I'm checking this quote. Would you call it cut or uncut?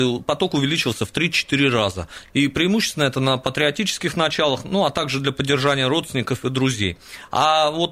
uncut